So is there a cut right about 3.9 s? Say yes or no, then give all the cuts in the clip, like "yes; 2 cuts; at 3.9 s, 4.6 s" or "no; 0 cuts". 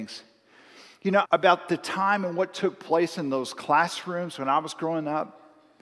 no; 1 cut; at 1.2 s